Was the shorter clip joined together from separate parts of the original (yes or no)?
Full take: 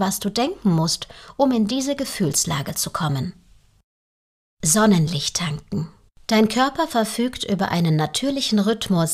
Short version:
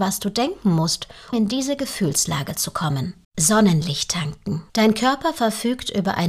yes